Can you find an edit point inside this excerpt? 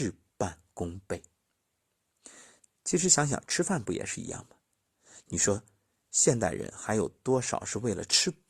no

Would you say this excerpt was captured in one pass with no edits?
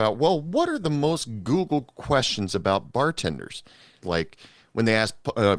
no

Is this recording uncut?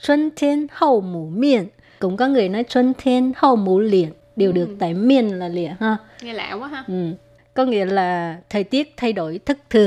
yes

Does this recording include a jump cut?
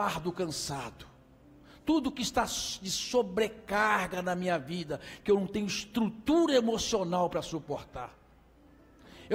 no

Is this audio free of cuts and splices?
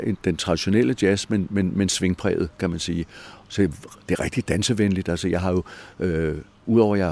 yes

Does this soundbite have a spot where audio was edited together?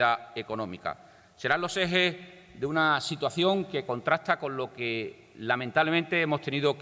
no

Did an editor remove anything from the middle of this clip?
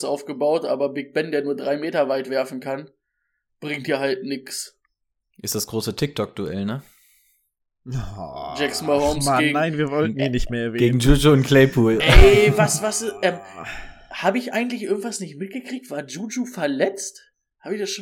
no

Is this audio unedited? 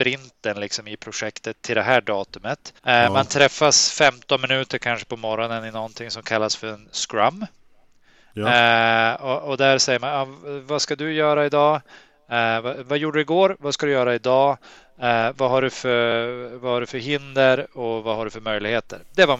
no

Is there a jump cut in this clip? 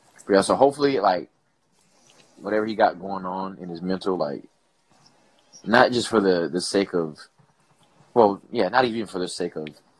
no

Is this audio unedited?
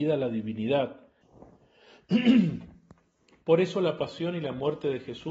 no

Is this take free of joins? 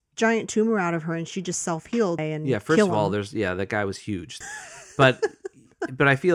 no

